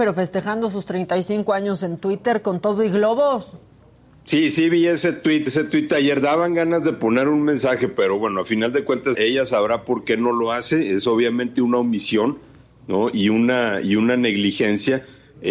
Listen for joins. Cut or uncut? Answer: cut